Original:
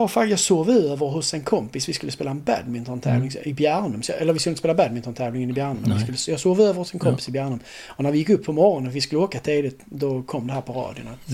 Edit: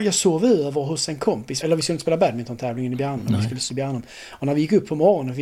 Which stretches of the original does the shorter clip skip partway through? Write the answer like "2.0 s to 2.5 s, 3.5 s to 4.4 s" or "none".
1.9 s to 4.2 s, 6.3 s to 7.3 s